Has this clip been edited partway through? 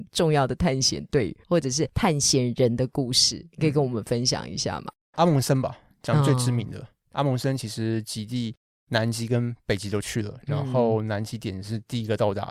no; 0 cuts

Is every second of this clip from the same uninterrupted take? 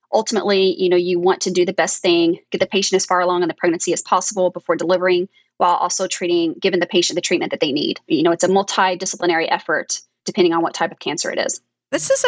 yes; 0 cuts

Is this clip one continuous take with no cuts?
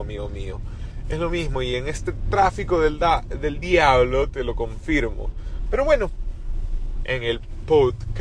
no; 2 cuts; at 5.7 s, 7.0 s

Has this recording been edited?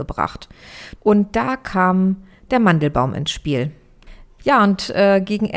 yes; 2 cuts; at 1.0 s, 4.4 s

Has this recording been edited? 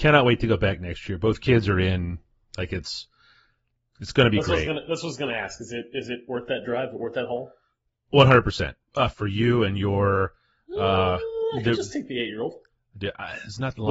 yes; 1 cut; at 9.1 s

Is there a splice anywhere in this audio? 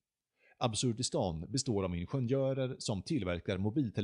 no; 0 cuts

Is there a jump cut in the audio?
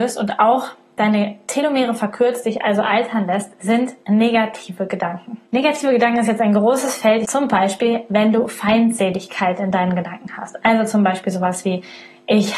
yes; 2 cuts; at 5.5 s, 7.2 s

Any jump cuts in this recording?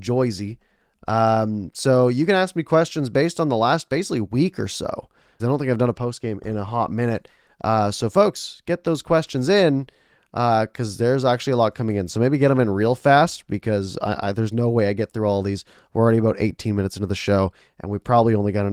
yes; 1 cut; at 5.4 s

